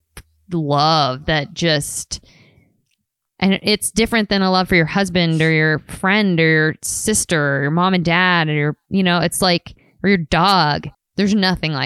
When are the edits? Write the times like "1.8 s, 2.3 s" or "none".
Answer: 10.9 s